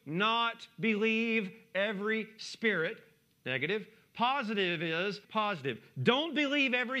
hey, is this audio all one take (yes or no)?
no